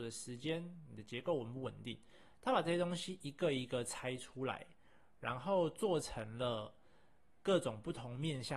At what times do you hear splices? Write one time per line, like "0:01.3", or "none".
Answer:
none